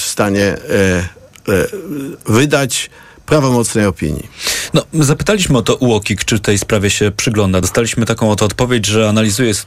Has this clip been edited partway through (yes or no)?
no